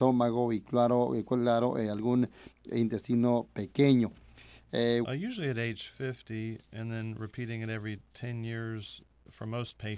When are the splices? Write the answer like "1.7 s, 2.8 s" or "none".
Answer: 5.0 s